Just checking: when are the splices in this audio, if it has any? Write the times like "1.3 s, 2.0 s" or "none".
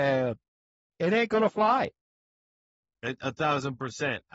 none